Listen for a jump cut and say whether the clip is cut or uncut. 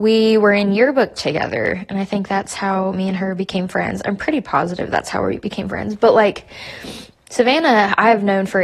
uncut